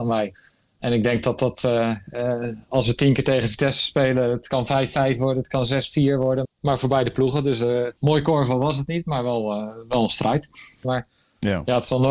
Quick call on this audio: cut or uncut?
cut